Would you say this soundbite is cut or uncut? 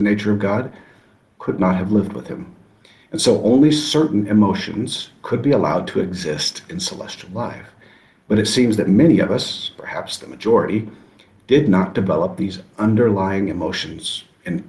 uncut